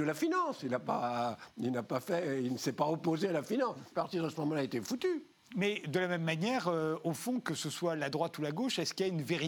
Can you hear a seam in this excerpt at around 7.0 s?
no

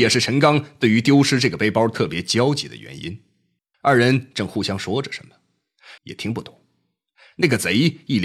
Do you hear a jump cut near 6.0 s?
yes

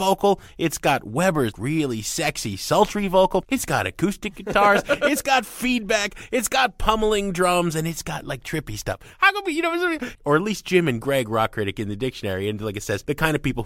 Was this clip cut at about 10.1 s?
yes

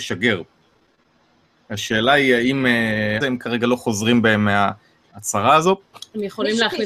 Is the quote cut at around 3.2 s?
yes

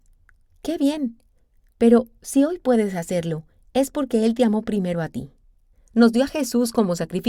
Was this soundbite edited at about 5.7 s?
yes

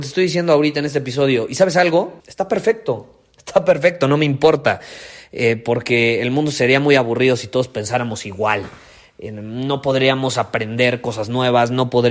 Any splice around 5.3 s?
no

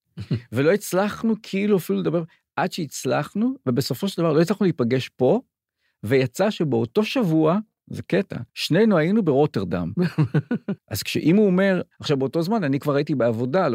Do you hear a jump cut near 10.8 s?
yes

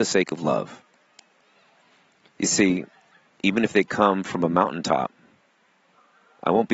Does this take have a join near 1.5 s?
no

